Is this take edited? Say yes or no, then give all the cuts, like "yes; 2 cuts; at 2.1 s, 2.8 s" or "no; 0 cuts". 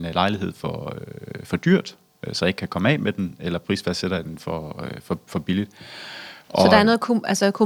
no; 0 cuts